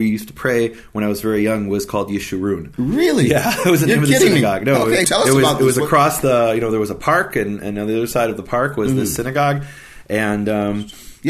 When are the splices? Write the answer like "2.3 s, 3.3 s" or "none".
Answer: 5.0 s

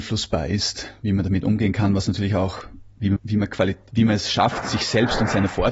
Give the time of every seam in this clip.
3.2 s

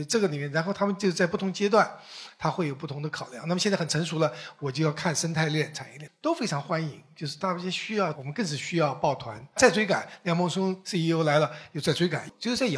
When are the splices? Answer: 6.1 s, 8.1 s, 9.6 s

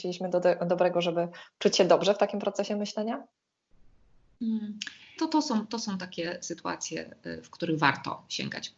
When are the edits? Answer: 5.2 s

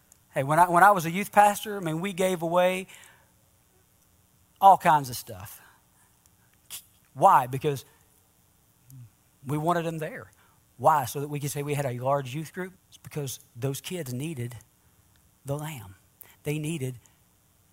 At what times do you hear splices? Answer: 12.7 s

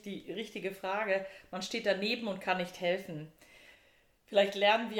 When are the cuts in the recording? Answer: none

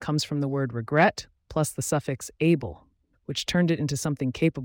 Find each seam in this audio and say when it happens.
3.1 s

